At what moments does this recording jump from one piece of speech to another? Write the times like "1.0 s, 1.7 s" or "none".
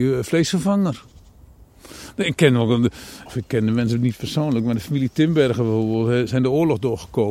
3.3 s

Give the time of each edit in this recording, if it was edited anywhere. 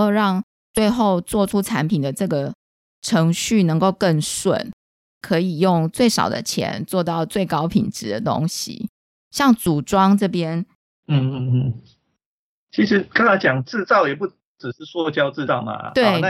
9.2 s

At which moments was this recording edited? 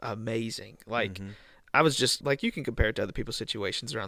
2.2 s

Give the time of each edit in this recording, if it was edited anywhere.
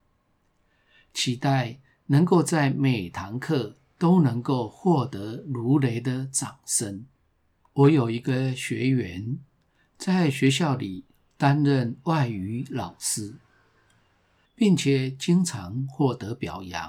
7.6 s, 14.5 s

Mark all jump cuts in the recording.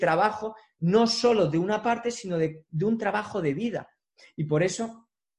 none

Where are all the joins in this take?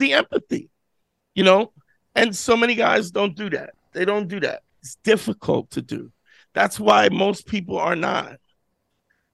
4.7 s

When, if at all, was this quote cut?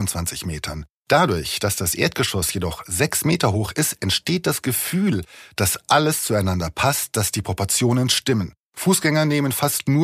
none

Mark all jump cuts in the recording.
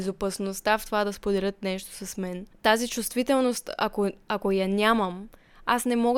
none

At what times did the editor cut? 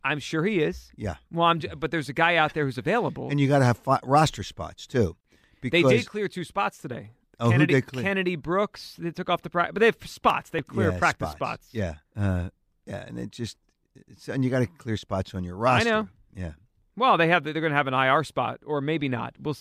12.1 s

